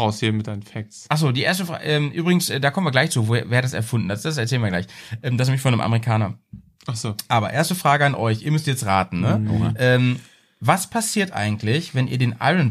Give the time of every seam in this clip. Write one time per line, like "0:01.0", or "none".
none